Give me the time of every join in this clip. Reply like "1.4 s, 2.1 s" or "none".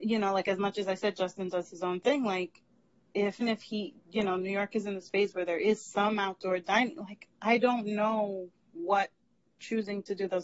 3.4 s